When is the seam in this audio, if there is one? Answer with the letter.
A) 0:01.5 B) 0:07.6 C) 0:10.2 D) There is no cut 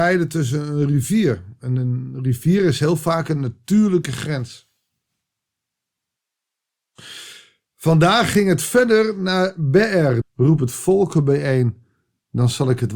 C